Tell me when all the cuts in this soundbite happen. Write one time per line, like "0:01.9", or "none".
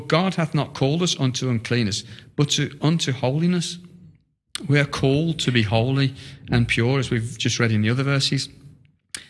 none